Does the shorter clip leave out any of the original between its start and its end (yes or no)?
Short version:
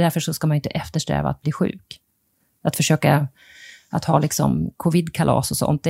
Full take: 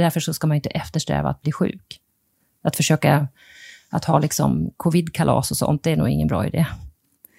no